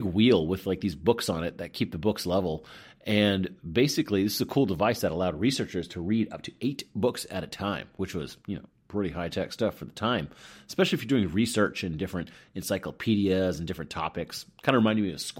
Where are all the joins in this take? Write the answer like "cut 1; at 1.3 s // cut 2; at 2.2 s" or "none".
none

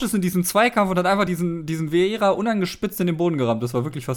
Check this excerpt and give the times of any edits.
none

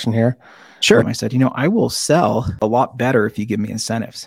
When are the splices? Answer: cut 1; at 1.0 s

